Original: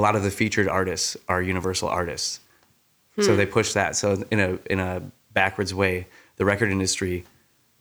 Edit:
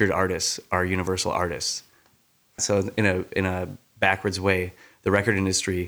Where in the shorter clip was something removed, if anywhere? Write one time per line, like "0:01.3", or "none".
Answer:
0:02.6